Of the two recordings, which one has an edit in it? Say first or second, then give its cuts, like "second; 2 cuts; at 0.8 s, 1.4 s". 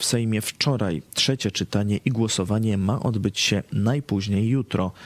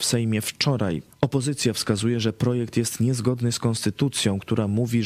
second; 1 cut; at 1.1 s